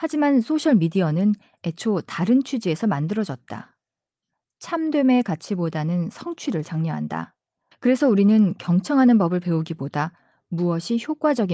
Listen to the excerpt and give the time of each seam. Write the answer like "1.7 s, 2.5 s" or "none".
7.7 s